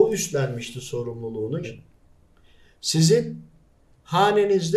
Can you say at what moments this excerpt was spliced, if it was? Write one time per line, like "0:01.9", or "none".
0:01.6